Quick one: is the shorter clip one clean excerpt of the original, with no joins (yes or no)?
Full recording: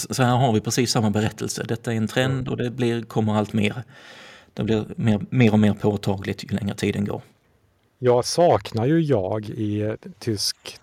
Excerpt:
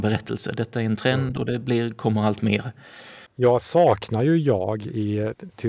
no